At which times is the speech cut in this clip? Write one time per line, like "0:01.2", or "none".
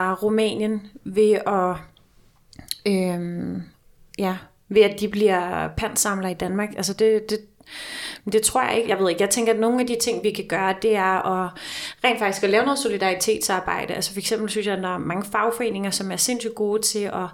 0:08.8